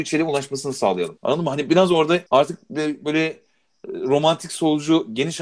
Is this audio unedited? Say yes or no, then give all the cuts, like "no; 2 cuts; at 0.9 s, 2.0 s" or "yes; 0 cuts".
no; 2 cuts; at 1.2 s, 2.3 s